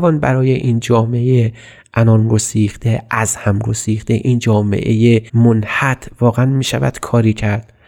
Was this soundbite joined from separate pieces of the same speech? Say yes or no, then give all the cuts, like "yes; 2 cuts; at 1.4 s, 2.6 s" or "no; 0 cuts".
yes; 1 cut; at 5.3 s